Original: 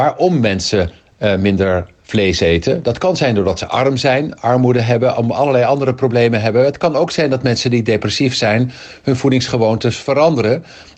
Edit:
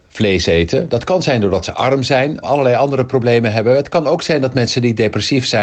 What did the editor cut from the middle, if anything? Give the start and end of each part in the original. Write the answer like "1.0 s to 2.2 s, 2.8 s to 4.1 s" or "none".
4.4 s to 5.3 s